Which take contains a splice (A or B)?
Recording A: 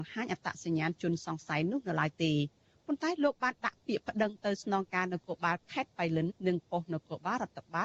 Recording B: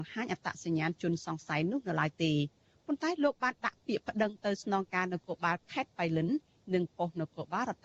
A